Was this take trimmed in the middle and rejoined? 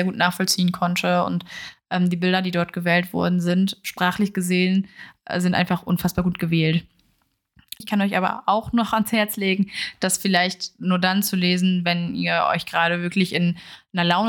yes; 1 cut; at 7.8 s

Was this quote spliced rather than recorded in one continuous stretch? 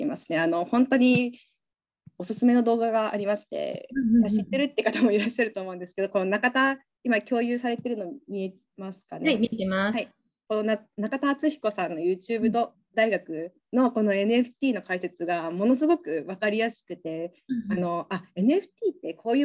no; 0 cuts

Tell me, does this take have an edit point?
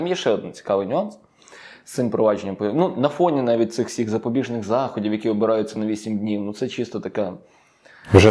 no; 0 cuts

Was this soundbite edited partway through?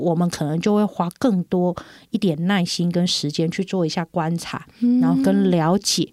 no; 0 cuts

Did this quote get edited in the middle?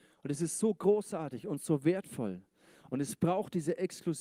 no; 0 cuts

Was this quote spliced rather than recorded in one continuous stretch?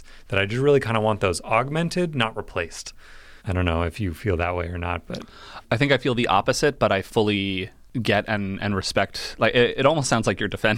yes; 1 cut; at 3.4 s

